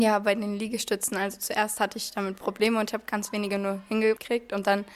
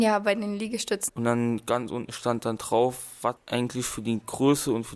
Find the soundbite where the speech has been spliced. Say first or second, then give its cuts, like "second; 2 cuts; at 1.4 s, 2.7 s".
second; 2 cuts; at 1.1 s, 3.4 s